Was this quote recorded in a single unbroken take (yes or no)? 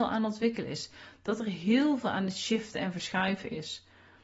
yes